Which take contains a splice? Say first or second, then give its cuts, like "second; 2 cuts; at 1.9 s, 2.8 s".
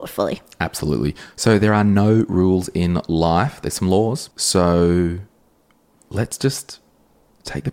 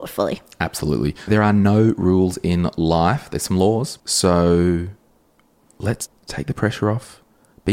second; 2 cuts; at 1.3 s, 6.1 s